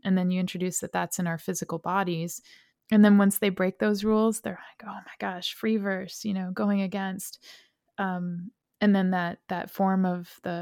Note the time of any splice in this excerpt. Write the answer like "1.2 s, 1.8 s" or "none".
2.7 s